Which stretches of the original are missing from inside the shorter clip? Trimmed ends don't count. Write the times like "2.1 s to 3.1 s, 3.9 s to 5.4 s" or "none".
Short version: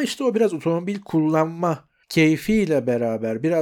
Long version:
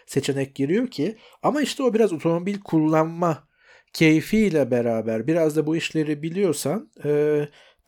3.6 s to 3.9 s